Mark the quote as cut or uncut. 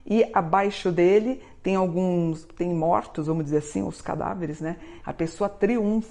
cut